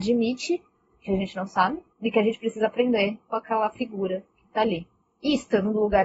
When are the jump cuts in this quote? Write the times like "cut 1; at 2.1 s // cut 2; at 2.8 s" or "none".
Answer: cut 1; at 1.9 s